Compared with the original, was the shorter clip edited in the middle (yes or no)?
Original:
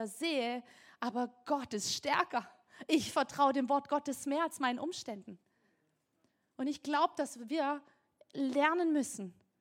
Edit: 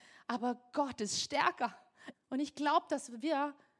yes